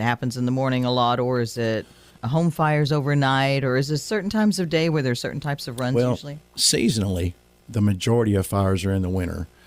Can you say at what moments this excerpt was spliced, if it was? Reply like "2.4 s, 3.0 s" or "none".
none